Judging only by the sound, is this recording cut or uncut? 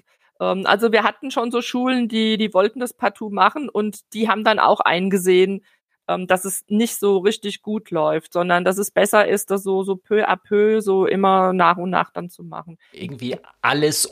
cut